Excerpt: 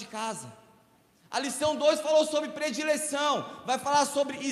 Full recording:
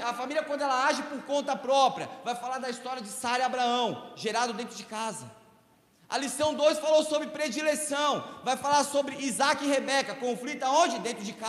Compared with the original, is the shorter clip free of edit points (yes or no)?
yes